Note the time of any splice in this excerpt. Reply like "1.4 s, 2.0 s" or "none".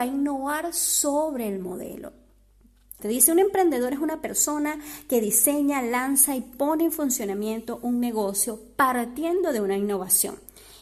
3.0 s